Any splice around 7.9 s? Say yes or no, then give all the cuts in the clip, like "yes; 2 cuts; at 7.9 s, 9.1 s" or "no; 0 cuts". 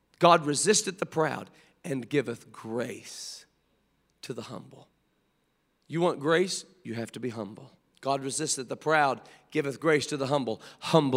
yes; 1 cut; at 7.9 s